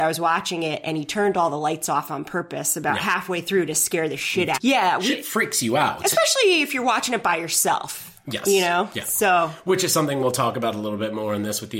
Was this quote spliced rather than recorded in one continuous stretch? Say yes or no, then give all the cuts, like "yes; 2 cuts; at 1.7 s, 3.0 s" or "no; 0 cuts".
yes; 1 cut; at 4.6 s